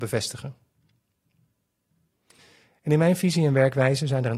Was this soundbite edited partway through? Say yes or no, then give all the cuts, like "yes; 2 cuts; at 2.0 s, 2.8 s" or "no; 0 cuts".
no; 0 cuts